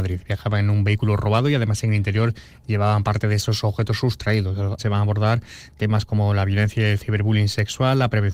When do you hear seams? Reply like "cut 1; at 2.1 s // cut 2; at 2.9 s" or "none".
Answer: cut 1; at 4.8 s